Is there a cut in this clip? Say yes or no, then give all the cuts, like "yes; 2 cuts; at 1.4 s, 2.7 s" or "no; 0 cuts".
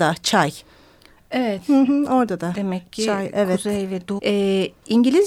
yes; 1 cut; at 4.2 s